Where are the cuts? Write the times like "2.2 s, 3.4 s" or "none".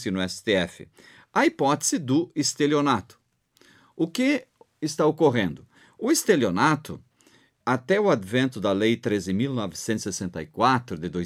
7.6 s